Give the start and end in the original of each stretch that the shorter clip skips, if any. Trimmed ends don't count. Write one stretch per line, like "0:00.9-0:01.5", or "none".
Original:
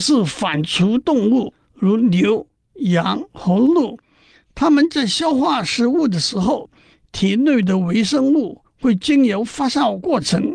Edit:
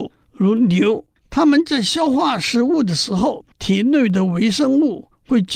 0:02.6-0:04.4
0:06.8-0:07.1